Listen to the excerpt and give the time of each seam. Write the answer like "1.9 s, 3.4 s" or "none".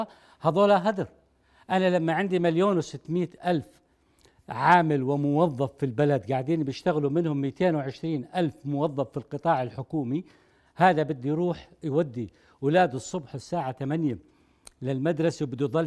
none

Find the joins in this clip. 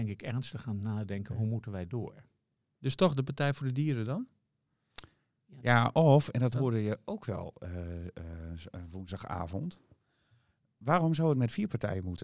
none

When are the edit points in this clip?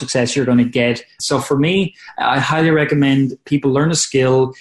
1.2 s

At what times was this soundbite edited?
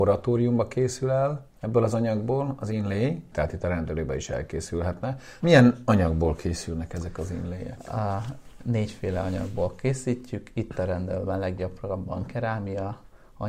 1.5 s, 3.3 s, 5.4 s

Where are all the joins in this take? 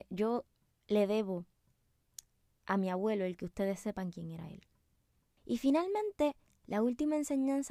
5.4 s

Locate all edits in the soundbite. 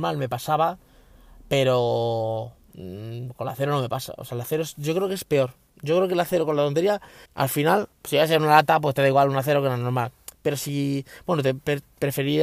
7.3 s

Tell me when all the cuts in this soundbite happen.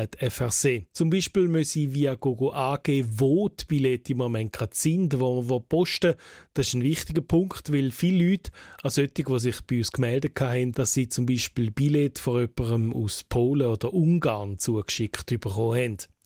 0.9 s, 10.7 s

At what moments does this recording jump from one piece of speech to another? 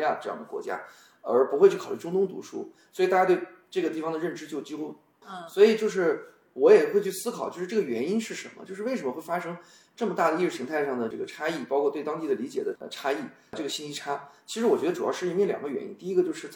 5.2 s

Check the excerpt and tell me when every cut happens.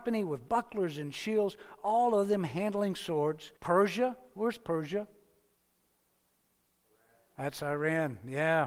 3.6 s

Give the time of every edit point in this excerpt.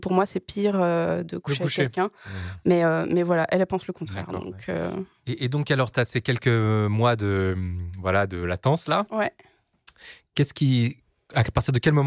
none

